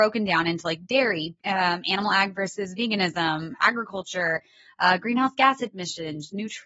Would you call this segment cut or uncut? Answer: cut